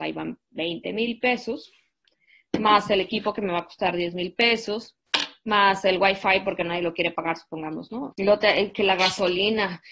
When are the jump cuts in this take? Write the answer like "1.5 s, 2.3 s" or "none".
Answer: 8.1 s